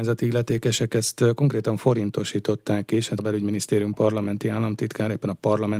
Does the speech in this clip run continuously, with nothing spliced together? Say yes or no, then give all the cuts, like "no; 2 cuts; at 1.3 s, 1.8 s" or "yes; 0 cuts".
no; 1 cut; at 3.2 s